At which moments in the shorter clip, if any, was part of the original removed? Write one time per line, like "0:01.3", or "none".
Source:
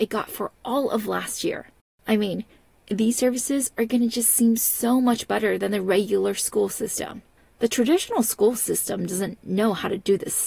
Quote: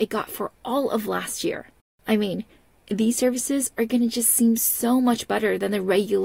none